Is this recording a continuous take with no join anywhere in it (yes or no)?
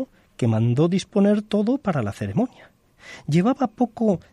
yes